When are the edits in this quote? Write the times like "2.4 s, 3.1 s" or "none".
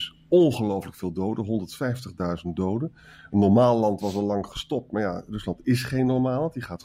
none